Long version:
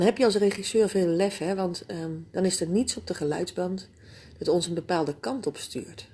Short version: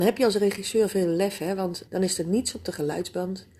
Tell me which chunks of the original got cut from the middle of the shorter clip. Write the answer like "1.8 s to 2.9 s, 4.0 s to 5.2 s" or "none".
1.9 s to 2.3 s